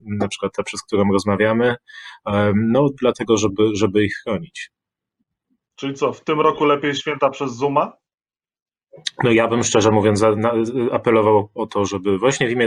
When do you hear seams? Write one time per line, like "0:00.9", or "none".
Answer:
none